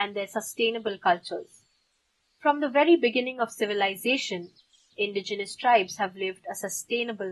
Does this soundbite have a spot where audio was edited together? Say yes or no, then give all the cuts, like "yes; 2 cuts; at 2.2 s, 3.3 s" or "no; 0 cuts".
no; 0 cuts